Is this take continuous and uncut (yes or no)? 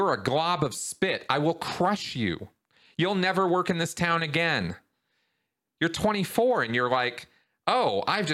yes